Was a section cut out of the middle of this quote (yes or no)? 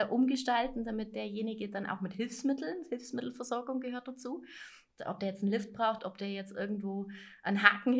yes